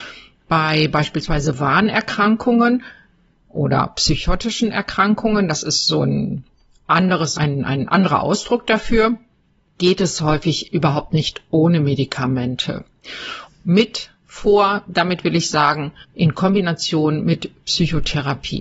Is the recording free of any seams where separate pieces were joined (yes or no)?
no